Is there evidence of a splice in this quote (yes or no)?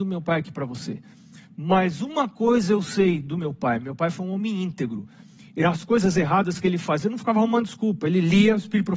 no